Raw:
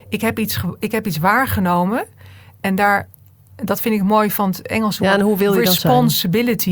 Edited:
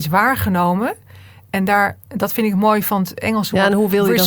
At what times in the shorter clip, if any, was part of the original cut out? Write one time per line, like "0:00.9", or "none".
0:02.1